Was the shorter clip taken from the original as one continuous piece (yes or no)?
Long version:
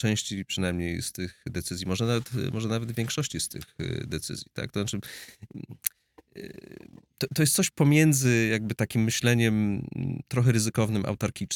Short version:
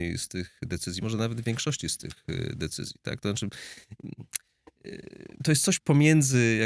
no